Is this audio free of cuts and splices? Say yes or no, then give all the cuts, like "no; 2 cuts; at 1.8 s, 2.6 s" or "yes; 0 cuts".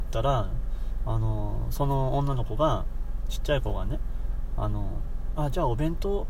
yes; 0 cuts